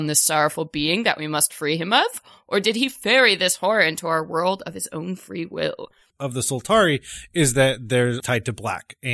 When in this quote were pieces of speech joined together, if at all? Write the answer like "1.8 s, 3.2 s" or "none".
6.1 s, 8.2 s